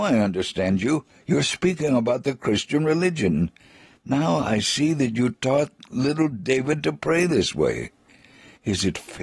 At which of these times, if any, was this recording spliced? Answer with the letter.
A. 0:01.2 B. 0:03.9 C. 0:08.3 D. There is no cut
D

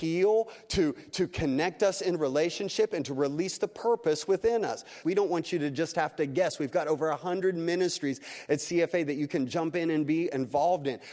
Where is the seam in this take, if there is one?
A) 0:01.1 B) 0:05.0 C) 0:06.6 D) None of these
B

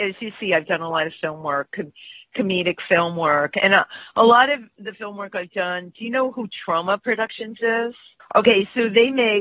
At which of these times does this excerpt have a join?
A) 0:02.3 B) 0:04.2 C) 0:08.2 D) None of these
C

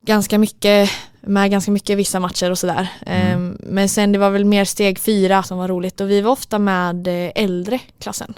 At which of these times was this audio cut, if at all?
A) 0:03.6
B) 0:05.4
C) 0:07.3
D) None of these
B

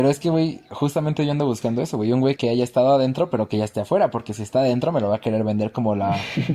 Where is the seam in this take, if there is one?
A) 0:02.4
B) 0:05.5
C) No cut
A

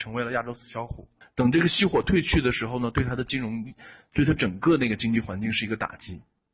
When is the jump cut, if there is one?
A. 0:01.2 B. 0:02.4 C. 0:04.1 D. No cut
A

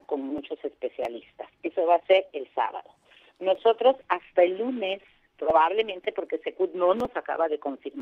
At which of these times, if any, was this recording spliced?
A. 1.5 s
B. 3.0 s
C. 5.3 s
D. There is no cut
D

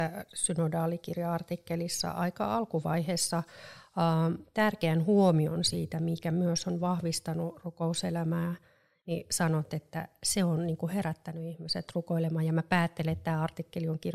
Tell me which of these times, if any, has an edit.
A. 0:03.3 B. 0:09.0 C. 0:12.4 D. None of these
B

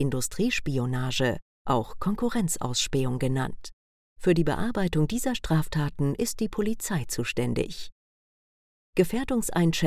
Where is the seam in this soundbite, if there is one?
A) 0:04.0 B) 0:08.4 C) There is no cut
A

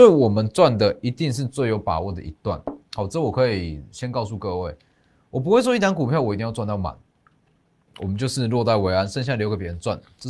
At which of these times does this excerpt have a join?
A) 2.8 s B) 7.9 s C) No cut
B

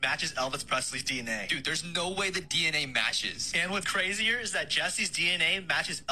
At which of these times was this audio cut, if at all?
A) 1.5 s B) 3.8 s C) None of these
B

